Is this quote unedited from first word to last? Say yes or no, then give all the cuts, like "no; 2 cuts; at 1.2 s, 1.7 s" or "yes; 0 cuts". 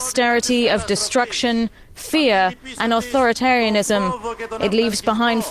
yes; 0 cuts